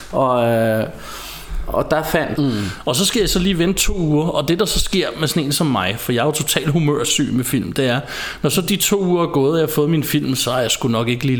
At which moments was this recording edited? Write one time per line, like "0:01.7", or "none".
0:02.4